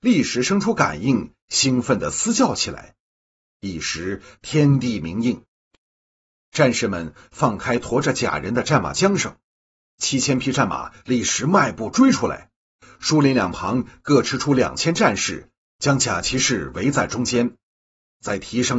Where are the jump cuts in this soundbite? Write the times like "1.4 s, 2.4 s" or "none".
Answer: none

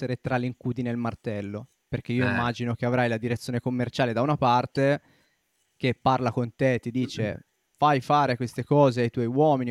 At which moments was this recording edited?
none

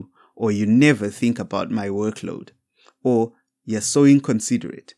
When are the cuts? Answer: none

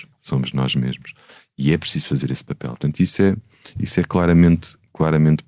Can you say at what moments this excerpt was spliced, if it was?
2.7 s

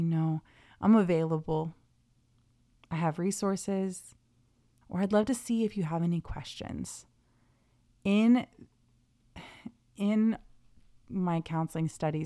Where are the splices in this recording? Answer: 4.8 s

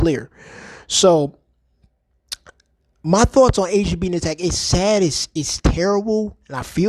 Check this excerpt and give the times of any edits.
none

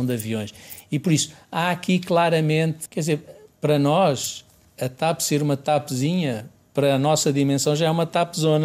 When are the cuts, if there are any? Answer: 2.9 s

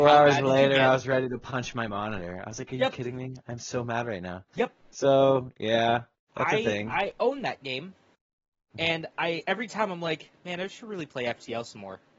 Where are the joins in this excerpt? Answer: none

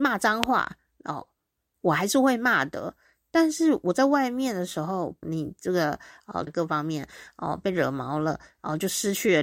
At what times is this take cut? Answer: 5.2 s, 6.5 s

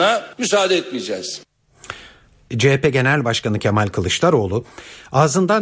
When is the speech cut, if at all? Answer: 2.5 s

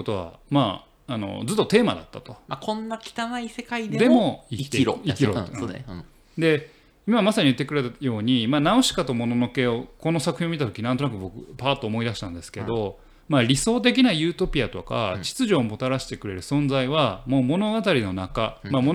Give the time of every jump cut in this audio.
none

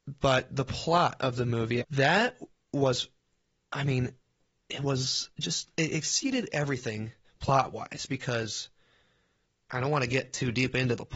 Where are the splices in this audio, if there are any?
1.8 s

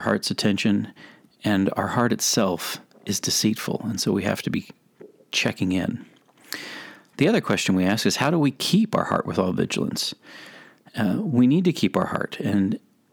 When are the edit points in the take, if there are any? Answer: none

